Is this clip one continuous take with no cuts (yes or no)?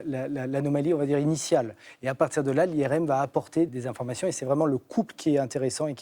no